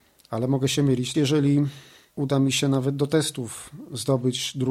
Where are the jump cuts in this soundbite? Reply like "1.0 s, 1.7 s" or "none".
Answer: 1.1 s